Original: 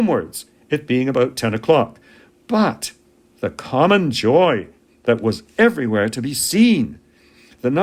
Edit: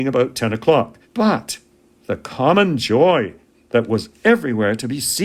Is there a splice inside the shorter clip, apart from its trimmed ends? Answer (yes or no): yes